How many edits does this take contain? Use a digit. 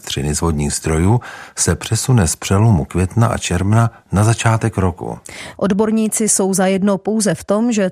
1